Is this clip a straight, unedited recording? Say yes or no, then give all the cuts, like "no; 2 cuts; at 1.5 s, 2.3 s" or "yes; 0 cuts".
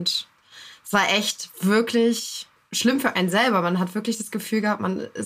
yes; 0 cuts